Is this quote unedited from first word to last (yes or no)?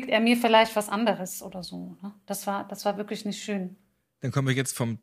yes